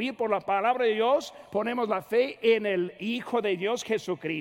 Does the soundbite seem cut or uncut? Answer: uncut